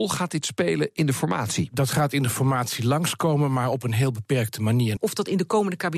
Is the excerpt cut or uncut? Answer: cut